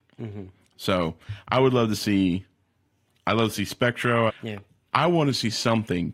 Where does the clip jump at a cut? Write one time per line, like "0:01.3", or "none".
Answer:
0:04.3

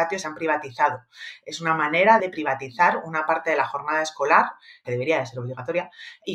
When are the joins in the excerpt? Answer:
none

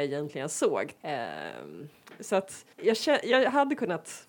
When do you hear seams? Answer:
0:01.0
0:02.7

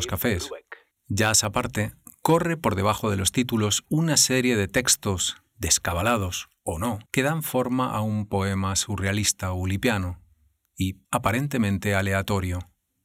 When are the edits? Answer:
0:00.9
0:07.1
0:11.0

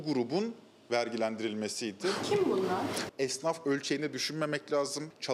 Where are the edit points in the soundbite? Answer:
0:03.1

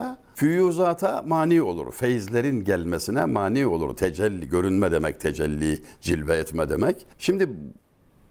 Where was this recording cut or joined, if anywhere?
0:07.1

